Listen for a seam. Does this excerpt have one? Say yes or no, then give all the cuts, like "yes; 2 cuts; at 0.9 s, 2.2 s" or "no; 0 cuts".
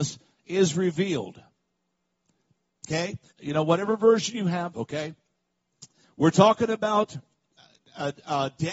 yes; 3 cuts; at 3.3 s, 4.7 s, 6.0 s